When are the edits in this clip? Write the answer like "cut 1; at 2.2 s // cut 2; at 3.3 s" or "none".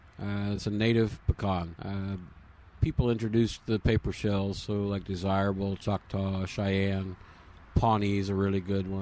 cut 1; at 1.8 s